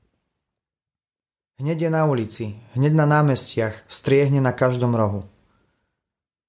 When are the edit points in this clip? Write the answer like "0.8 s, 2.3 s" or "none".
none

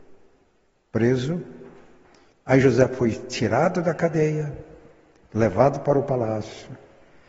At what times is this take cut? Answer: 2.3 s

